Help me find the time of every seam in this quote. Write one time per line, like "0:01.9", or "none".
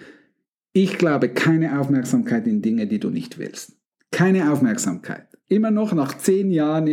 0:04.0
0:05.4